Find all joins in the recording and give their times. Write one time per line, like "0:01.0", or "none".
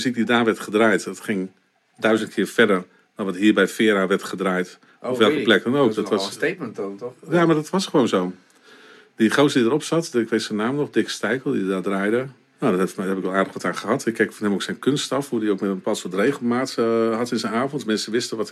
0:12.4